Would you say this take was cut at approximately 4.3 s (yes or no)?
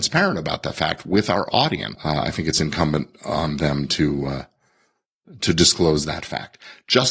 no